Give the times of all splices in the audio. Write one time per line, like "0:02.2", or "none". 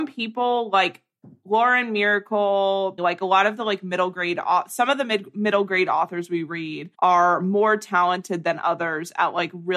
0:03.0
0:06.9